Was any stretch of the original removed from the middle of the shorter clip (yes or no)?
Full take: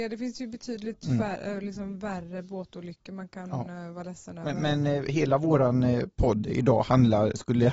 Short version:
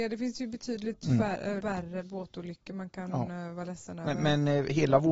yes